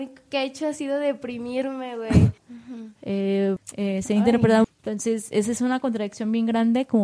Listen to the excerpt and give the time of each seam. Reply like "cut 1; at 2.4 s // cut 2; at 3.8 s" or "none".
cut 1; at 2.4 s // cut 2; at 3.6 s // cut 3; at 4.6 s